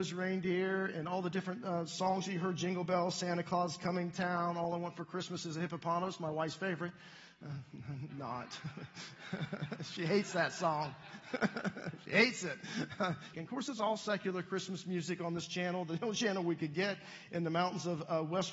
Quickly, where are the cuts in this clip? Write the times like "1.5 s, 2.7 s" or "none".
13.3 s